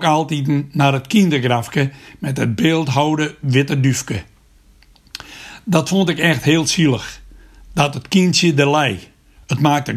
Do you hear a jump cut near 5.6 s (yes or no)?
no